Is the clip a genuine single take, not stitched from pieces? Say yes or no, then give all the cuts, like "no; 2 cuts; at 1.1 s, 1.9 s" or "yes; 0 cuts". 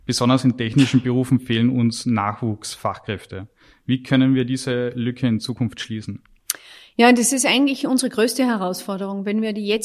yes; 0 cuts